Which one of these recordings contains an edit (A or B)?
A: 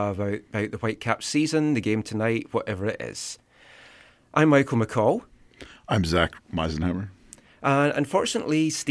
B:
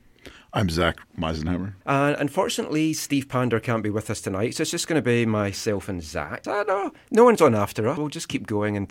B